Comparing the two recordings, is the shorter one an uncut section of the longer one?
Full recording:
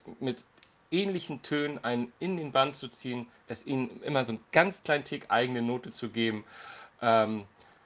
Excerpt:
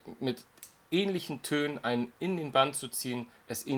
yes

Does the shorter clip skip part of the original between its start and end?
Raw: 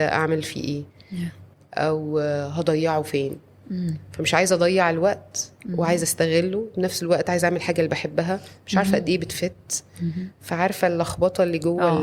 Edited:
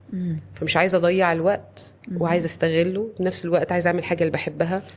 no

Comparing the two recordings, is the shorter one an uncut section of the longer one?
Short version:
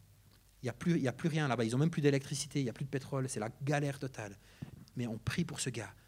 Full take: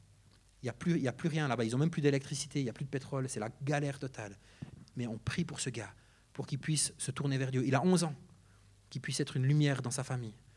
yes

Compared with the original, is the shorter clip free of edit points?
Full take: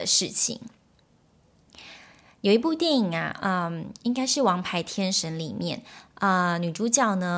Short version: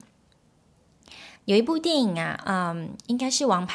no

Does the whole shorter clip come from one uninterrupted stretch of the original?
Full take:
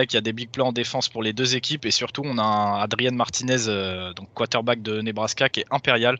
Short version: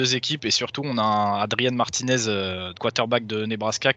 no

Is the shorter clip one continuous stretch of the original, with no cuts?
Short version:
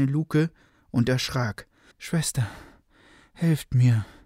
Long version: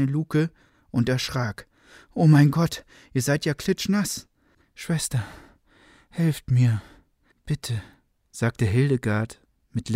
no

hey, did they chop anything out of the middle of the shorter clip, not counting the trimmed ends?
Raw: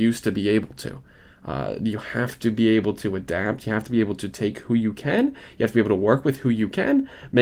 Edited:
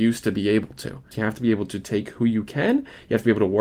yes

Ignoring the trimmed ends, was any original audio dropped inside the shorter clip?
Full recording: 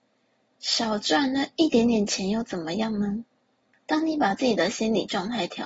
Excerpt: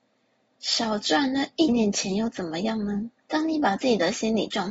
yes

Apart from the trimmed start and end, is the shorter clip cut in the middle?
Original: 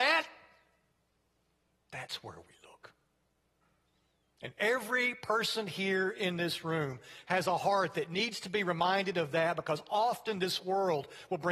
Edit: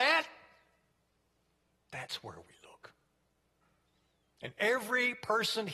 no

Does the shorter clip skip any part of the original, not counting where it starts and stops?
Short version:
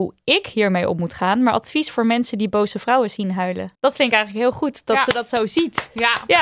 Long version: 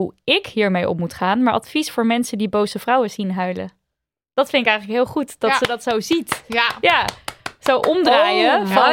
yes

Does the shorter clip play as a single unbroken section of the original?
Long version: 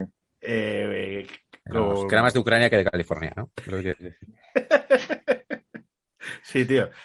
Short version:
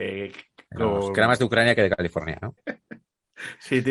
no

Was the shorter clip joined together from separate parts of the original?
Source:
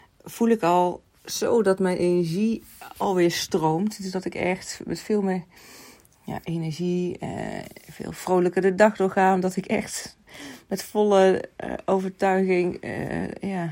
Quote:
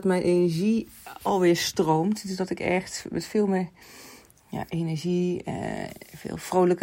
no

